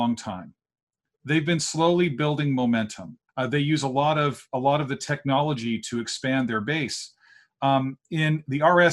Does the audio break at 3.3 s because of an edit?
yes; 1 cut; at 3.3 s

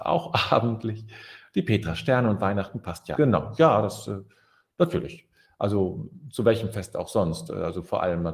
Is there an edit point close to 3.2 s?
yes; 1 cut; at 3.2 s

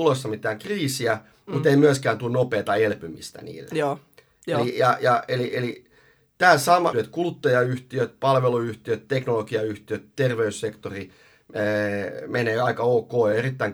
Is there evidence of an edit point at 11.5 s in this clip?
no; 1 cut; at 6.9 s

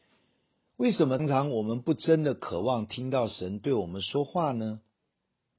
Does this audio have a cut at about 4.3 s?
no; 1 cut; at 1.2 s

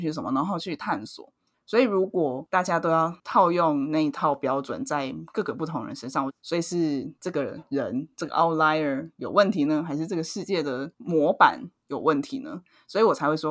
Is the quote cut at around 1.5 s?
yes; 2 cuts; at 1.5 s, 6.3 s

